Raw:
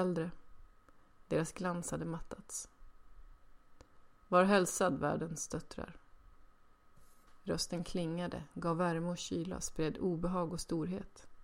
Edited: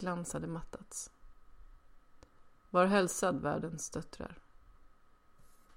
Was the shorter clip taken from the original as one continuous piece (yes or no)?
yes